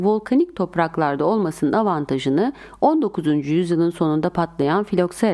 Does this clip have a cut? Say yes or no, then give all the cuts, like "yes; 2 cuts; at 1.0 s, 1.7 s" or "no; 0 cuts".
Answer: no; 0 cuts